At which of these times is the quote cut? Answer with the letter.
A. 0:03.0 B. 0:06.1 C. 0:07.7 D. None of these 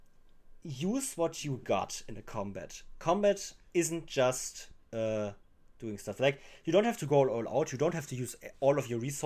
D